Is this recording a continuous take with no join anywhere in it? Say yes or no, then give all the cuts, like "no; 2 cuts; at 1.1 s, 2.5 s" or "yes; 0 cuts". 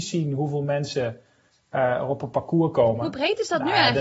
yes; 0 cuts